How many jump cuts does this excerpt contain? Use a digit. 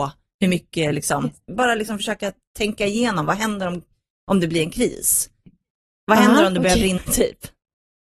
2